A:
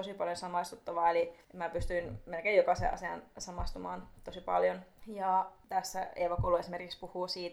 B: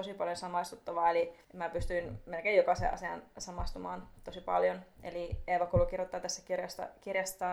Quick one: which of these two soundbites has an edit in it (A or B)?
A